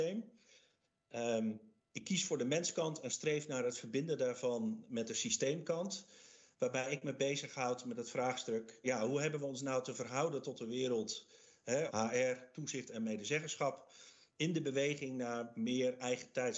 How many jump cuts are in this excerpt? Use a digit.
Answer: 2